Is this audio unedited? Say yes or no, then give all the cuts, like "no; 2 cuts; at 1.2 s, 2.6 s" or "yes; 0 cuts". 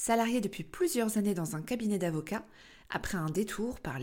no; 1 cut; at 2.8 s